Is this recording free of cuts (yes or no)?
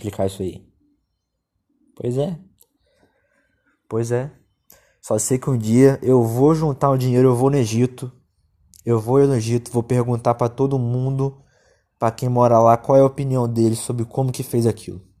yes